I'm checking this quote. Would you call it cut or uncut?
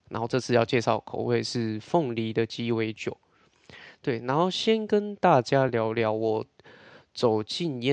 uncut